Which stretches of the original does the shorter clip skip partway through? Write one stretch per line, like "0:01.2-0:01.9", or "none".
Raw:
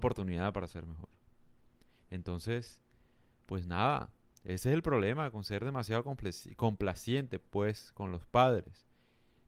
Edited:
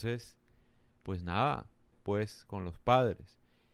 0:04.4-0:07.4